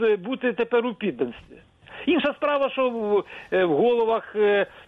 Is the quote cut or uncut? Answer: uncut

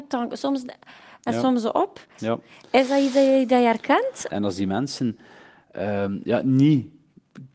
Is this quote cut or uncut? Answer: cut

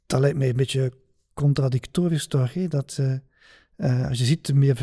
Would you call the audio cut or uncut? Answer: uncut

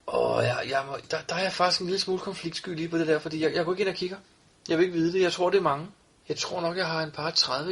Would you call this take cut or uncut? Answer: uncut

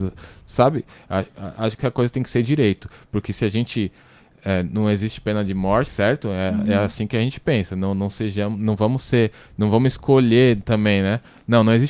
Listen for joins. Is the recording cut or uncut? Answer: cut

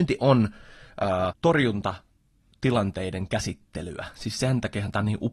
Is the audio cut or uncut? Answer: cut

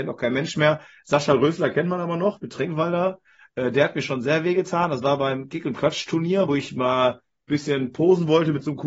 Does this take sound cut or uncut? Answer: uncut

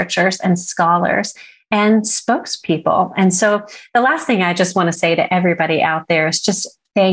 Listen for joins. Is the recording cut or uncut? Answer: uncut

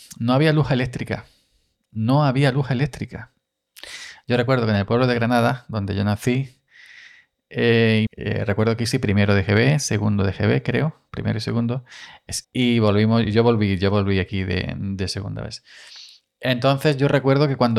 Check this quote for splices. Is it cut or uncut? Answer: cut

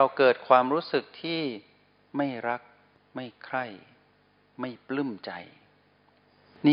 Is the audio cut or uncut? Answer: uncut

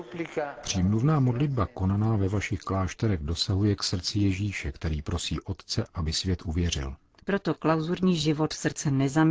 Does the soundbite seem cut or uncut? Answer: cut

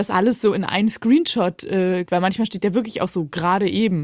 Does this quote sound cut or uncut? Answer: cut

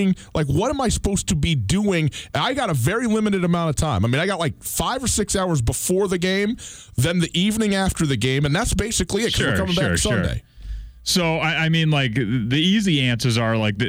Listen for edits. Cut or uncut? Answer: uncut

